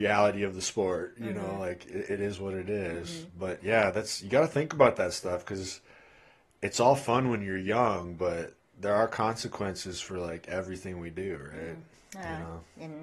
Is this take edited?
no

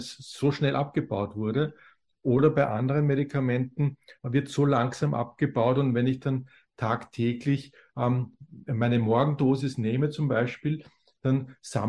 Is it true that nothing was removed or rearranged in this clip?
yes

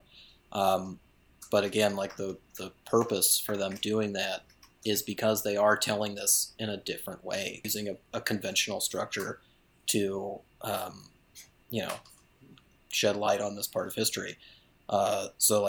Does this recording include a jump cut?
yes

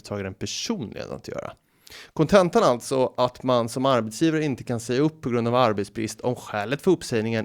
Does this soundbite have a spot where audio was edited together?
yes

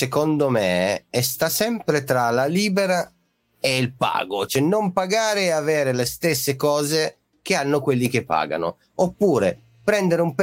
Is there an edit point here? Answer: yes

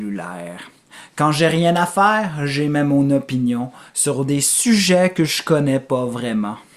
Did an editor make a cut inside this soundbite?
no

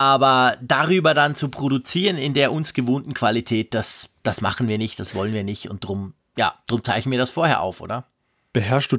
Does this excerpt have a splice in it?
no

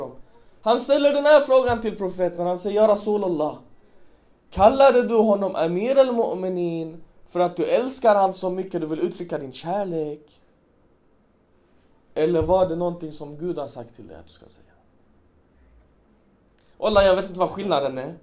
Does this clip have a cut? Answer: no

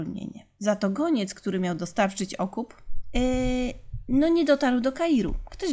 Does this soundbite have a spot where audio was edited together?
yes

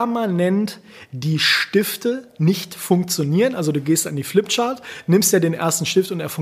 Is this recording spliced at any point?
no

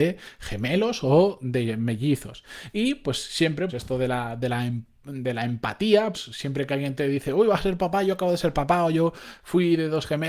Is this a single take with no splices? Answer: no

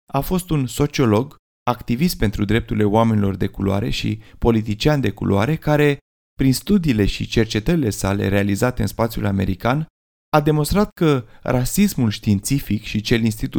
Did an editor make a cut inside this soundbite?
yes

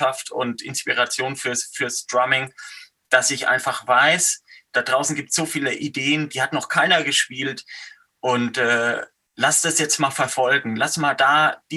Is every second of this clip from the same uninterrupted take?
yes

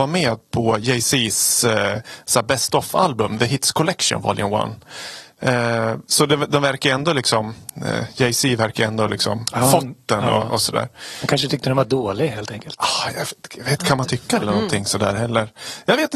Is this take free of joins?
no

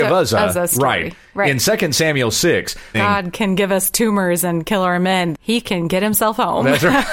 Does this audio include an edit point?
yes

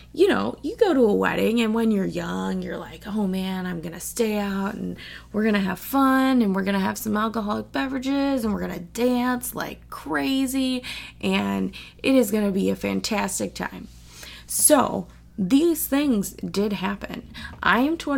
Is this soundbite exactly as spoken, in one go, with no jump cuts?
yes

